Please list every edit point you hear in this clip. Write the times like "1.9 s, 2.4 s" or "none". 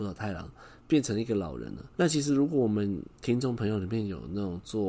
1.9 s, 3.2 s